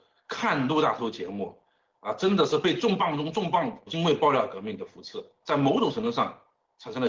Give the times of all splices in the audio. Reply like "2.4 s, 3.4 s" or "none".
3.9 s, 5.4 s